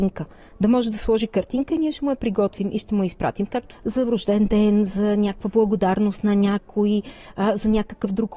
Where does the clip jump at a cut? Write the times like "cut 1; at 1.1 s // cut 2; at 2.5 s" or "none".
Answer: cut 1; at 3.7 s